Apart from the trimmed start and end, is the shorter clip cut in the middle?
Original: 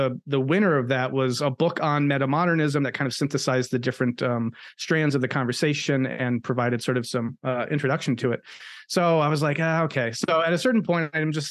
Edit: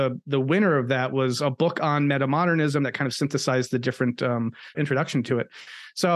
yes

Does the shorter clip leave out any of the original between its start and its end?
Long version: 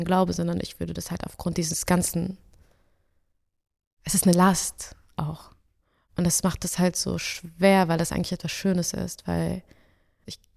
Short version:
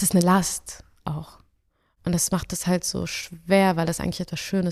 no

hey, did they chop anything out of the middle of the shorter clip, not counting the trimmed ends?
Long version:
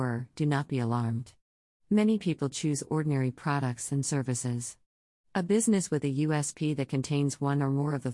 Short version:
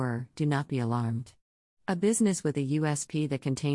yes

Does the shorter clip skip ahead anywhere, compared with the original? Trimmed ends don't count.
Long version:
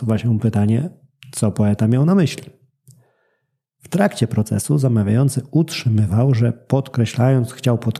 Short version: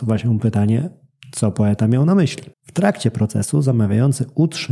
yes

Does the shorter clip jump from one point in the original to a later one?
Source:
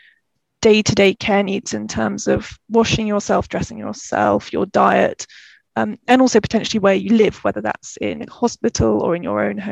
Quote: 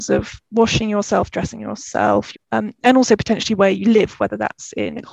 yes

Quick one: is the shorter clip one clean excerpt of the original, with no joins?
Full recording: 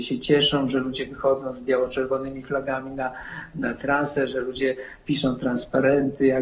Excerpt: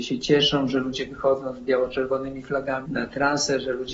no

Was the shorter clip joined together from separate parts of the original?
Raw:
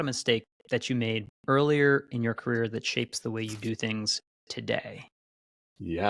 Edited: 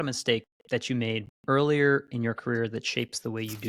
no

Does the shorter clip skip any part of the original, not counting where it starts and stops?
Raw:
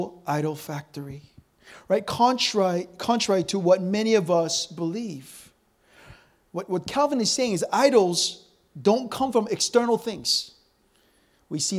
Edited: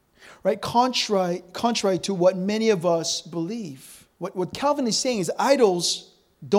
yes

